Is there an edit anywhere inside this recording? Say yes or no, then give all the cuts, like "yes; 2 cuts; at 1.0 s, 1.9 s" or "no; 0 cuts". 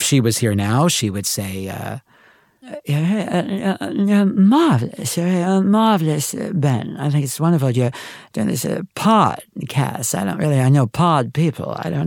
no; 0 cuts